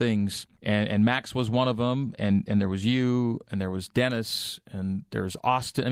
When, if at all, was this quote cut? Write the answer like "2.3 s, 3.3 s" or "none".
2.2 s

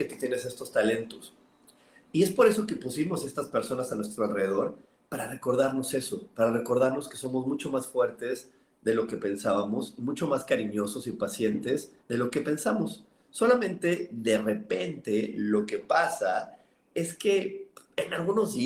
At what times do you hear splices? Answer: 12.0 s

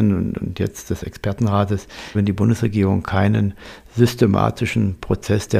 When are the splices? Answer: 2.1 s

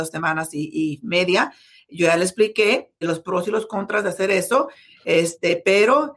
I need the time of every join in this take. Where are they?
3.0 s

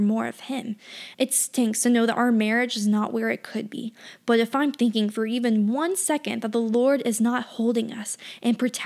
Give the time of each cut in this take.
1.1 s

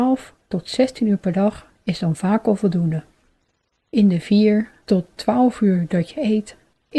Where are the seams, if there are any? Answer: none

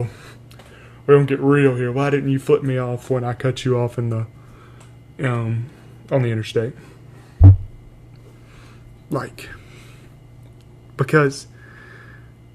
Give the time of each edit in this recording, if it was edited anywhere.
none

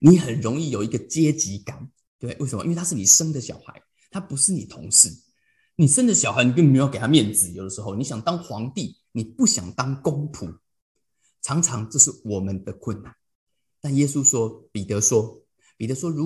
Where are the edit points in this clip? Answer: none

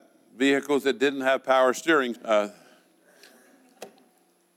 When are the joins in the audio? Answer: 2.1 s

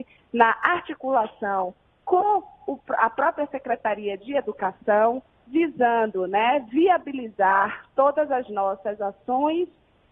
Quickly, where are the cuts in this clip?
none

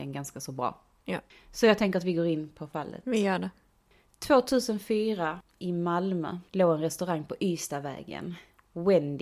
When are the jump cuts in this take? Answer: 6.5 s

